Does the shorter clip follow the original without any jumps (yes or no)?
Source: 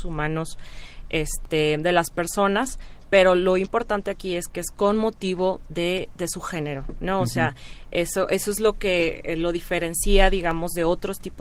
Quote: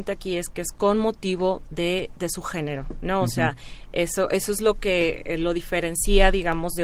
yes